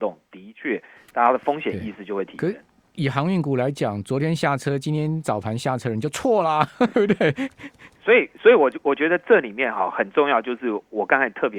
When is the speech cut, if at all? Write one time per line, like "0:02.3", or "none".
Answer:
0:06.9